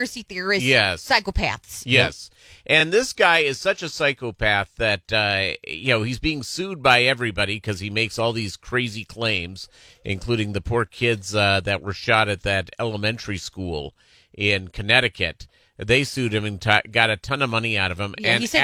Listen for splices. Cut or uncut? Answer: uncut